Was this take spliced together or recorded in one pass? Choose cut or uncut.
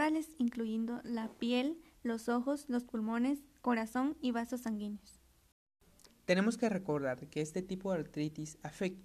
uncut